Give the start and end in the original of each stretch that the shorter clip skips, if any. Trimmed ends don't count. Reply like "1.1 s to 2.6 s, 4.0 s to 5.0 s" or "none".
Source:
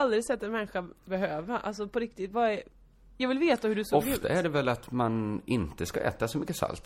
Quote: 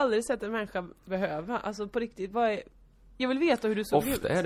none